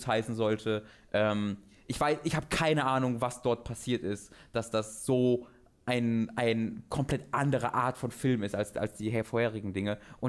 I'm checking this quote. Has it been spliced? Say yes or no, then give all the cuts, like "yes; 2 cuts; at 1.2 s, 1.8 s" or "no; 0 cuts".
no; 0 cuts